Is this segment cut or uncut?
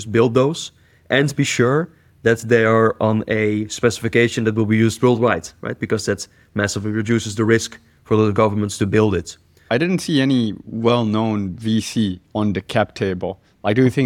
cut